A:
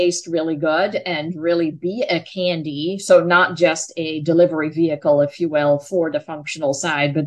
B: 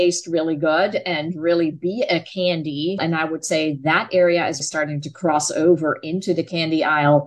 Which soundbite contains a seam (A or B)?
B